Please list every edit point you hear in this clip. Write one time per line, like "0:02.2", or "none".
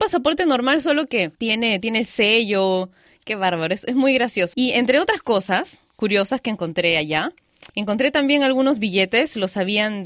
0:01.3
0:04.5
0:07.7